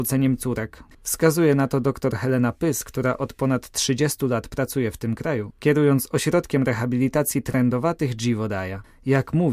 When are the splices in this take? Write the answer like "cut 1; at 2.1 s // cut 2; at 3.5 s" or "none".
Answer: cut 1; at 0.9 s